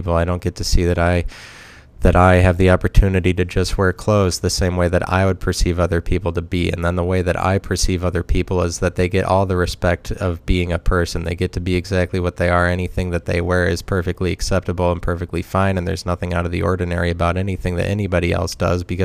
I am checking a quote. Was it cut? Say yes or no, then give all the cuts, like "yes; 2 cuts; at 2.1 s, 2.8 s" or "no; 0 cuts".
no; 0 cuts